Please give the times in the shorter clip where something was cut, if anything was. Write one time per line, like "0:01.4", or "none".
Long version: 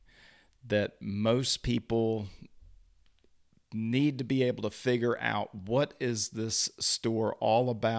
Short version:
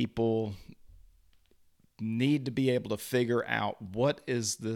none